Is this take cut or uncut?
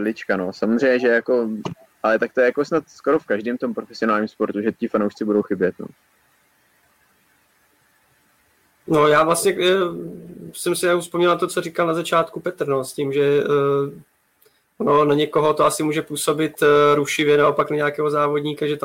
uncut